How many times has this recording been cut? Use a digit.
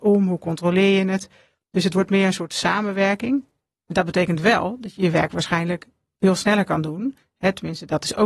1